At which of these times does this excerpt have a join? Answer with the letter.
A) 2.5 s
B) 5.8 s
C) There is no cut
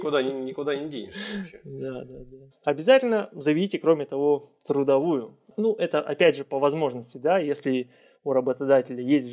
A